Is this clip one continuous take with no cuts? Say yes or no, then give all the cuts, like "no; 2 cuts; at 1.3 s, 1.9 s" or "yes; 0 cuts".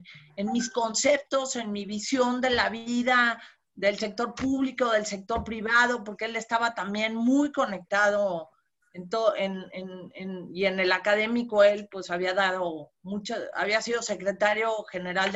yes; 0 cuts